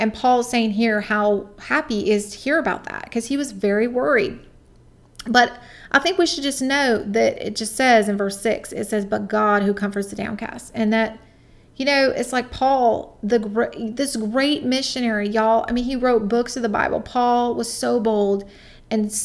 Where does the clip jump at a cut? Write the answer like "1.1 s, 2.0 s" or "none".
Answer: none